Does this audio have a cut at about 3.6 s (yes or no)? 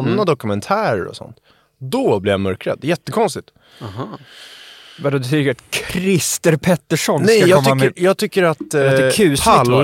no